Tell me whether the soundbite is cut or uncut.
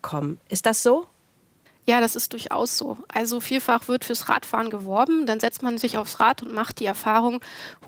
uncut